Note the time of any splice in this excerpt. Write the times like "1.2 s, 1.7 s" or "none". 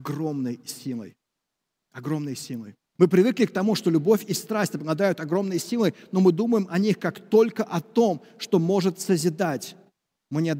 3.0 s